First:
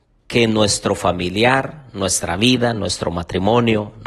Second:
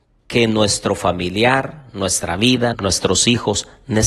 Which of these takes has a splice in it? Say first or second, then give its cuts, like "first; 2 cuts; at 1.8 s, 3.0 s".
second; 1 cut; at 2.7 s